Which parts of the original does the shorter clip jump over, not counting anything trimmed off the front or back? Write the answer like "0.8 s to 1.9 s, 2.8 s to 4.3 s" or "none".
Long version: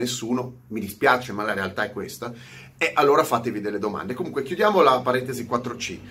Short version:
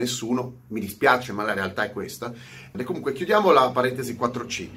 2.7 s to 4.0 s